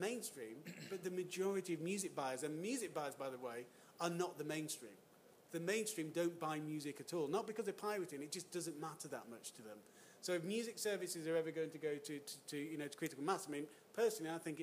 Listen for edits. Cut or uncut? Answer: uncut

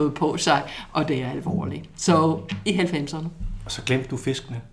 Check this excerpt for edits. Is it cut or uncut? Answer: uncut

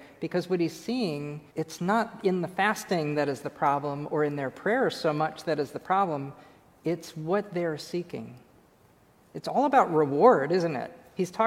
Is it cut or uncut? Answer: cut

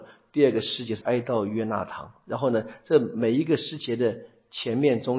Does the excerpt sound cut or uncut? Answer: cut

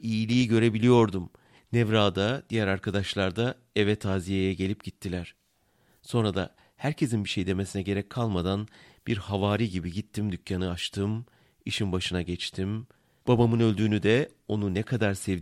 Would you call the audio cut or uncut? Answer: cut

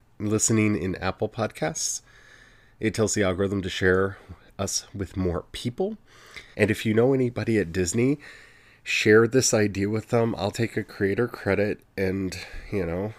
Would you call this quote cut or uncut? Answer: cut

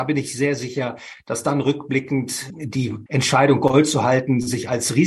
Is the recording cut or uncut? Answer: uncut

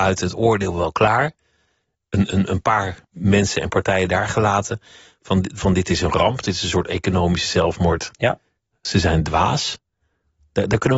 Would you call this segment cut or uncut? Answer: cut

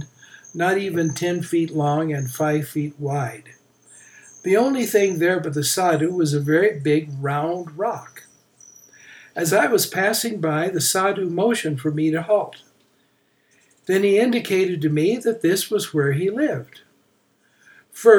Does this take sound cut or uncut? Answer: uncut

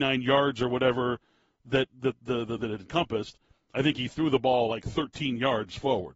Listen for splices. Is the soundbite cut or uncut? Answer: cut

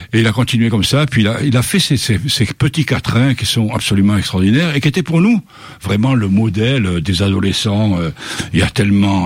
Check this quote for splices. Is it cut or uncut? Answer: uncut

